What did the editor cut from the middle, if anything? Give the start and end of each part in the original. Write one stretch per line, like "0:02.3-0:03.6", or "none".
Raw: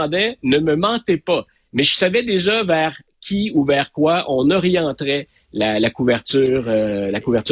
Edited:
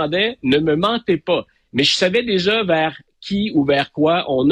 none